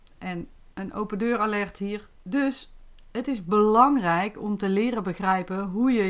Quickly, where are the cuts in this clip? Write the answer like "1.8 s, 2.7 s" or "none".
2.2 s